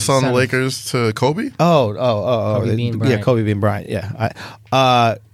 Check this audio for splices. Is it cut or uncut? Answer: uncut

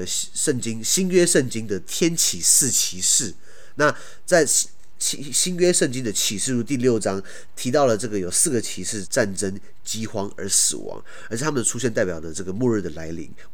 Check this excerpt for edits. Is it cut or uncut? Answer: cut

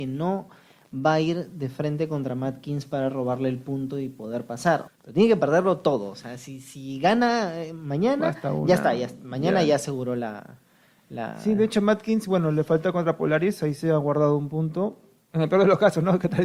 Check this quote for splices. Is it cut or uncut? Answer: cut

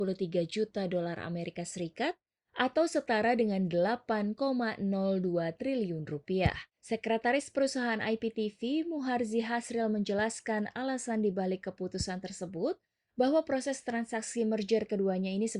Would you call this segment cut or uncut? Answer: cut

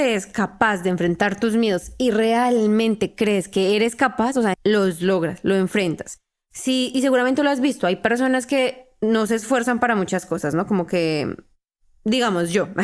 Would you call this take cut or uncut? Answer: cut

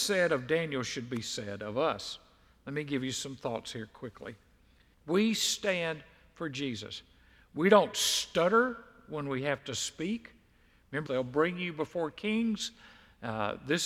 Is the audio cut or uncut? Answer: cut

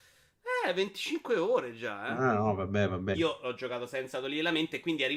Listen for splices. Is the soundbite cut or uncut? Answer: cut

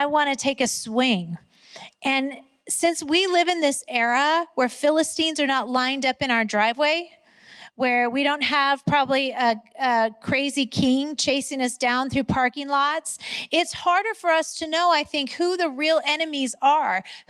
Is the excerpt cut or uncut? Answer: uncut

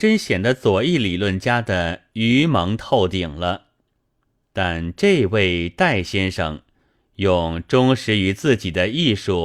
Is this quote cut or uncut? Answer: cut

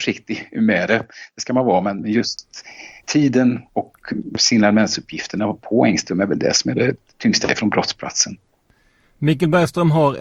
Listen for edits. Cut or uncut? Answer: cut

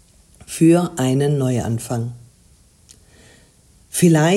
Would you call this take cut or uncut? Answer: uncut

